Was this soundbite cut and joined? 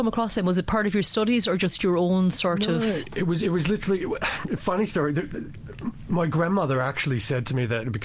no; 0 cuts

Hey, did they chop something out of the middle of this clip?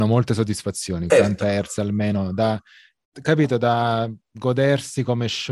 yes; 1 cut; at 1.1 s

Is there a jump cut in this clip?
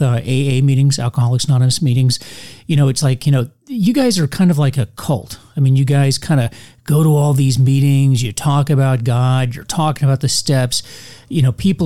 no; 0 cuts

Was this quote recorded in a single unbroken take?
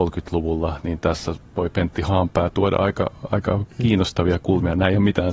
yes; 0 cuts

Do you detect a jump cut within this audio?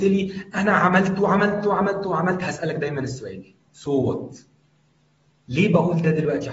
no; 0 cuts

